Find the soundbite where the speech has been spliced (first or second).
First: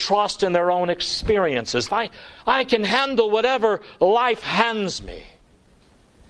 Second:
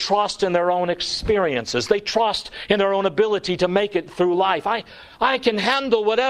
first